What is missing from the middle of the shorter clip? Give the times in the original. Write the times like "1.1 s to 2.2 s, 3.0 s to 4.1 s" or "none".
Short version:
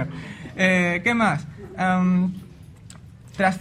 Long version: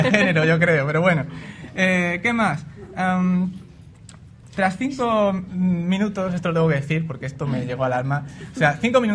none